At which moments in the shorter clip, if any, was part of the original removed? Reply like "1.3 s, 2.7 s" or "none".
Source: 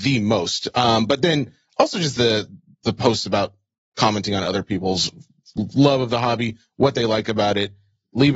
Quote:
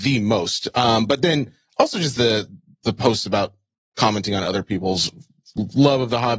none